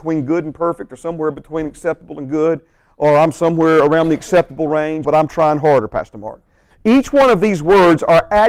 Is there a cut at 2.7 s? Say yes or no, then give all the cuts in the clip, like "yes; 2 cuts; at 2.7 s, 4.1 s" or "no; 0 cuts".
no; 2 cuts; at 5.0 s, 6.7 s